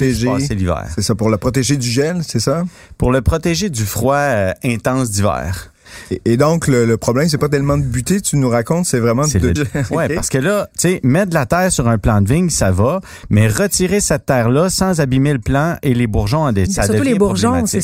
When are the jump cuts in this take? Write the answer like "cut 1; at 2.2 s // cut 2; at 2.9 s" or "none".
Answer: cut 1; at 9.6 s // cut 2; at 16.7 s